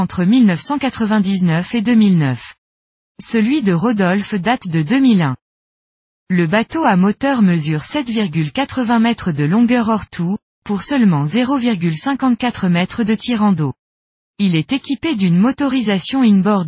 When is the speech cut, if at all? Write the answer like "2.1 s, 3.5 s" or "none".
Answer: none